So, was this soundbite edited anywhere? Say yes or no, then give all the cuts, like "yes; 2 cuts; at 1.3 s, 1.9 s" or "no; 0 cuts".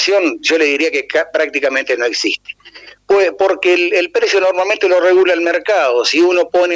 no; 0 cuts